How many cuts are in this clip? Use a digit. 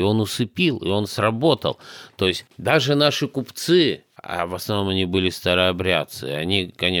0